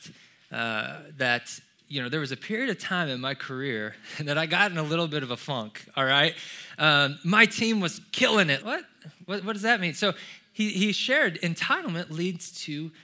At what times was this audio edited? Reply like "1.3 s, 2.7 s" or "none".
8.6 s